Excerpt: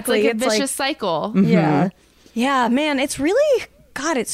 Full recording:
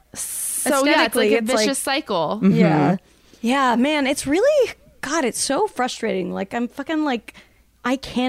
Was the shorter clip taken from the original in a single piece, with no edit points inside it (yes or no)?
yes